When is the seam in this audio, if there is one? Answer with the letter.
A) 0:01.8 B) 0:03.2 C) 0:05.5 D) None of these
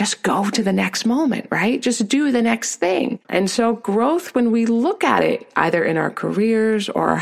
B